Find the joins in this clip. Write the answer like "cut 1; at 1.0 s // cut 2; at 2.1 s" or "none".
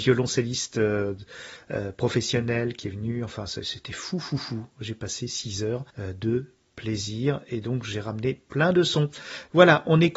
cut 1; at 5.9 s